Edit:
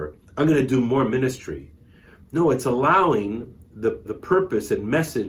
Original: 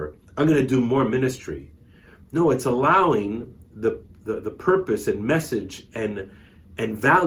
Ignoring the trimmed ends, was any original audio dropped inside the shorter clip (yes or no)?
yes